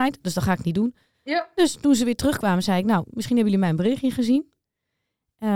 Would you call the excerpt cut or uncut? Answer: uncut